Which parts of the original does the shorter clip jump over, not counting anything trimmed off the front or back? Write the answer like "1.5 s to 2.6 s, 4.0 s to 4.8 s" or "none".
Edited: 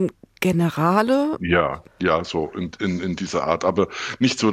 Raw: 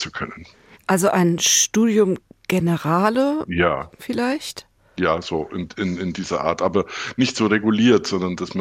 3.9 s to 4.8 s

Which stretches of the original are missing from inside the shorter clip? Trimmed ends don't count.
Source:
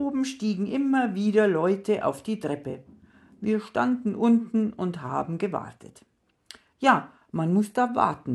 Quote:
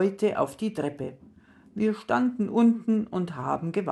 none

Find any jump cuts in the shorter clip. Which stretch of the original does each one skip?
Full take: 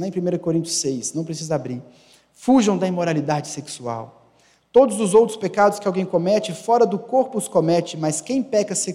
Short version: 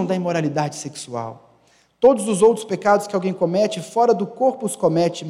none

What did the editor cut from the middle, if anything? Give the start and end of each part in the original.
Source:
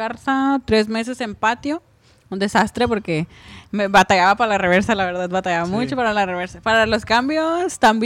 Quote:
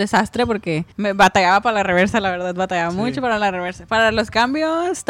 3.3 s to 3.7 s

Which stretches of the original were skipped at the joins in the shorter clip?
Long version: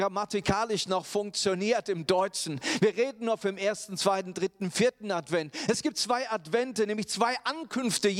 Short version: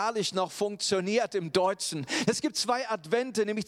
2.8 s to 5.7 s

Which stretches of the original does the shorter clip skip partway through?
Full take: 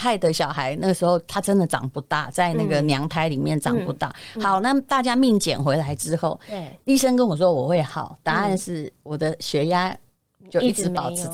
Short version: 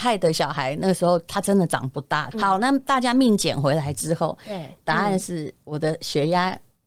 2.3 s to 4.3 s, 6.8 s to 8.2 s

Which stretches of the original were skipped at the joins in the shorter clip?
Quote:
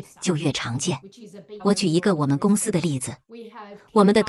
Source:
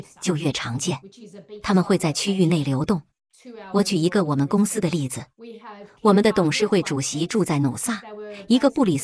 1.6 s to 3.7 s

